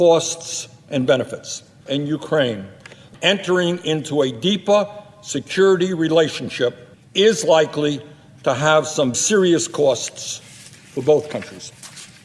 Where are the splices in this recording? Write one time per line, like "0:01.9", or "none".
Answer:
0:01.9
0:09.1